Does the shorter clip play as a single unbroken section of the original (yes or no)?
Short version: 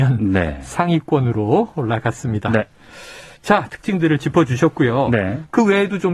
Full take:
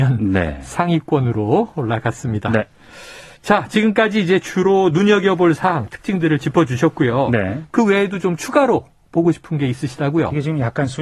no